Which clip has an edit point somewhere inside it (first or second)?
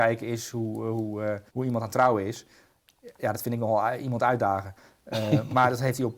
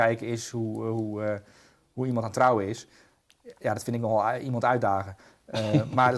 first